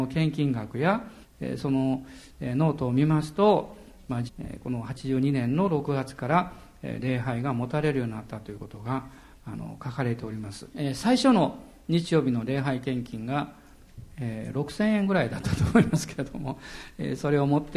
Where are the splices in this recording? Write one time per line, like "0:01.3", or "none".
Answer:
0:01.2
0:04.3
0:10.7